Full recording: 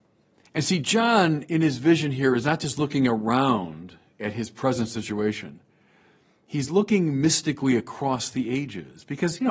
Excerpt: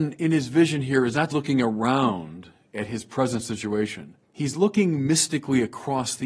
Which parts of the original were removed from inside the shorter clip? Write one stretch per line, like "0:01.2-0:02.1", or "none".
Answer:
0:02.6-0:02.8
0:05.7-0:06.4